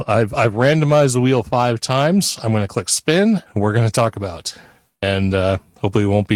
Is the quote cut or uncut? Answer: cut